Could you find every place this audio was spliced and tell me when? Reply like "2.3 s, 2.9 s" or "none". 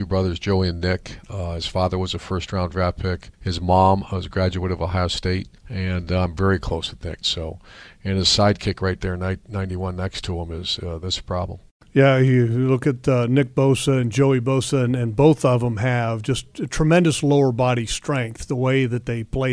3.3 s, 5.6 s, 7.2 s

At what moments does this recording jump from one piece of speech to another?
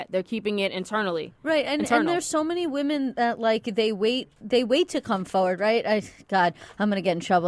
none

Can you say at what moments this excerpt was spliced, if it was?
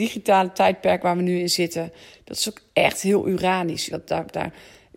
3.9 s

